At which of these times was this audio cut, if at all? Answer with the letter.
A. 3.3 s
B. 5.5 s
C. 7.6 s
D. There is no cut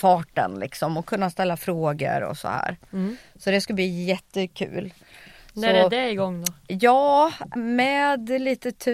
C